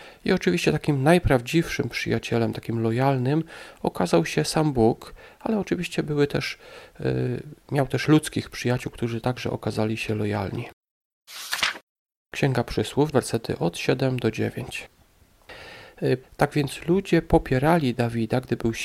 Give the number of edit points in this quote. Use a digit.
2